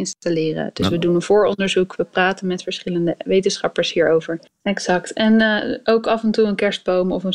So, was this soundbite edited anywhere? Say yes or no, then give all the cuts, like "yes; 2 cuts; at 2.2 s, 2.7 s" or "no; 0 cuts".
yes; 1 cut; at 4.5 s